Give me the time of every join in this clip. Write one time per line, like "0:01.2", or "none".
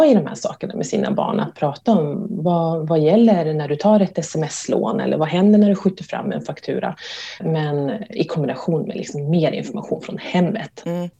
0:07.4